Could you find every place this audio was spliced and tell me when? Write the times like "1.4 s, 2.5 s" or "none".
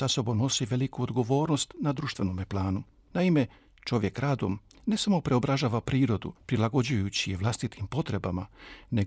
3.1 s, 6.4 s